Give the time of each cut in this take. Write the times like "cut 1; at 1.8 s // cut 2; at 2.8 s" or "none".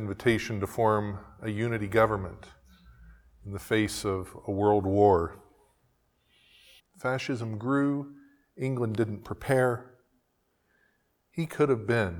cut 1; at 6.8 s